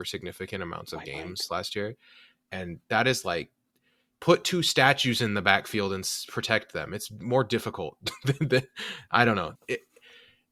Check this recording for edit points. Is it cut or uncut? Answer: cut